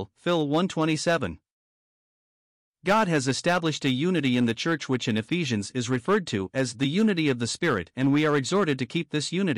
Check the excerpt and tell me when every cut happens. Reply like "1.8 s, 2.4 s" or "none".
none